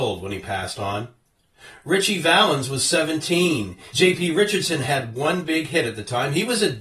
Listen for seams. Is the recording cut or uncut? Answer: cut